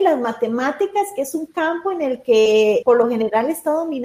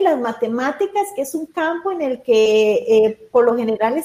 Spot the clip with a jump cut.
first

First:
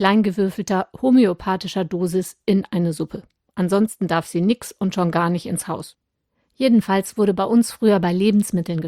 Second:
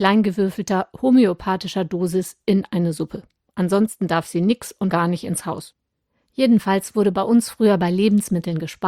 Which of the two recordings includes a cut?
second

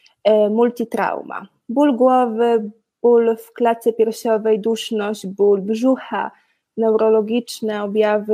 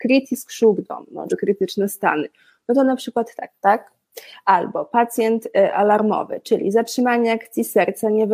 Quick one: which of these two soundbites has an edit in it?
second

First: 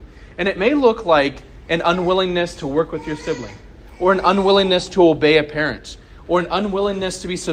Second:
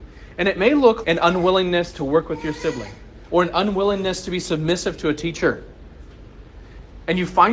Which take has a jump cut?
second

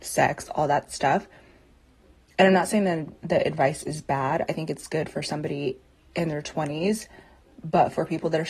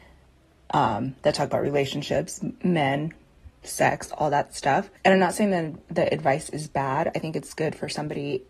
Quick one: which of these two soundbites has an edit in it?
second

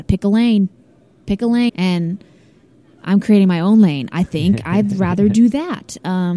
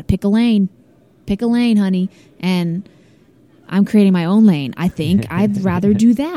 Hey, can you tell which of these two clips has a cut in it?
first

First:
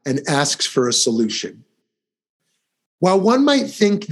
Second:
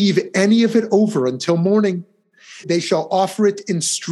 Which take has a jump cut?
second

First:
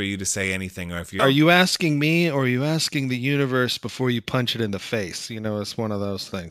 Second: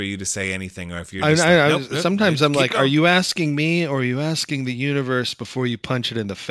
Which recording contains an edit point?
first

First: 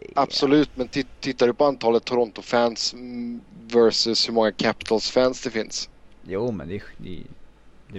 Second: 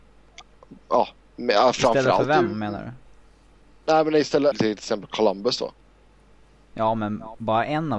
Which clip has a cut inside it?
second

